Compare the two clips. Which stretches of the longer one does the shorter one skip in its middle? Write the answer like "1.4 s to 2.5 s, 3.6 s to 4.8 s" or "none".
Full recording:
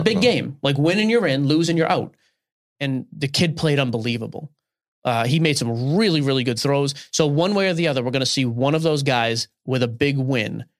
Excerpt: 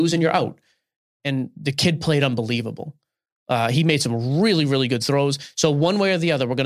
none